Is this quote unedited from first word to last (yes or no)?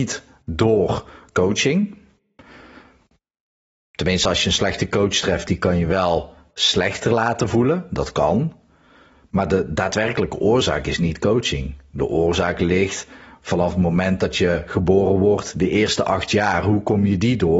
yes